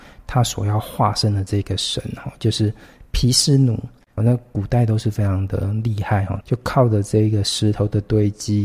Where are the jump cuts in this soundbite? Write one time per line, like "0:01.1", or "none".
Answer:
0:04.2
0:06.4